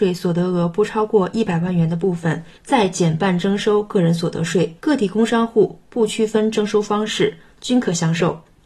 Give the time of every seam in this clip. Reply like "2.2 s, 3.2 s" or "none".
2.6 s, 4.8 s